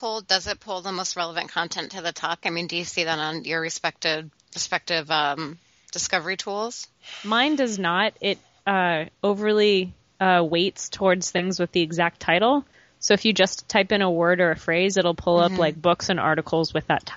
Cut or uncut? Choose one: cut